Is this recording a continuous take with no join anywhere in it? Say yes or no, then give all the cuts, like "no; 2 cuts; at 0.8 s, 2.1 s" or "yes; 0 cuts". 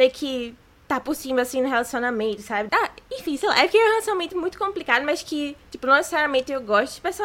no; 1 cut; at 2.7 s